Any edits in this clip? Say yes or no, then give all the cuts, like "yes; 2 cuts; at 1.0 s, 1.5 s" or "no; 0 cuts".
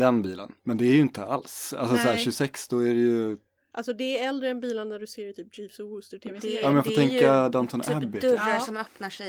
no; 0 cuts